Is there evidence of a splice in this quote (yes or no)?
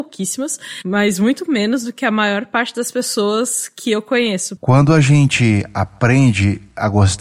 yes